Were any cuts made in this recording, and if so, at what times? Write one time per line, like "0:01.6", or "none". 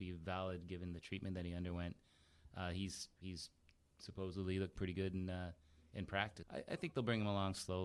0:06.4